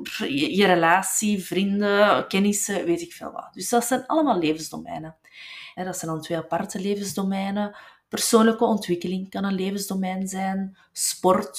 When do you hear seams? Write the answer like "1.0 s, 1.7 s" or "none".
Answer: 5.8 s